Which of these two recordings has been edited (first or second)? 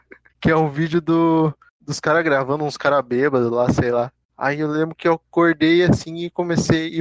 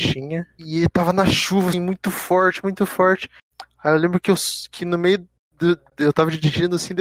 second